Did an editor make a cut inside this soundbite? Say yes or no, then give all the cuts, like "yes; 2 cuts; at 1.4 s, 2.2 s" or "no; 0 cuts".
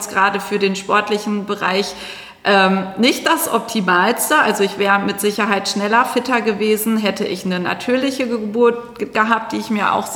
no; 0 cuts